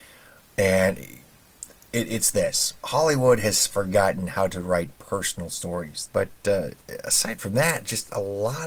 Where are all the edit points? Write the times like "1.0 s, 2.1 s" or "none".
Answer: 2.8 s, 6.1 s